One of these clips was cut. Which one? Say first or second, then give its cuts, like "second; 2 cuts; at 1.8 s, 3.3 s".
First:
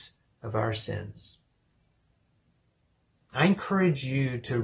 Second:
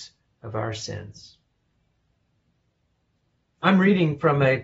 first; 1 cut; at 3.2 s